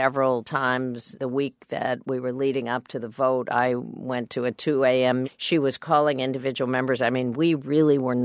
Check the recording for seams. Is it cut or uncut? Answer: cut